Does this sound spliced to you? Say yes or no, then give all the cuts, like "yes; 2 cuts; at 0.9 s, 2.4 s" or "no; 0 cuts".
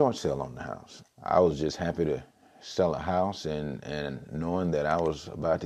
yes; 1 cut; at 1.0 s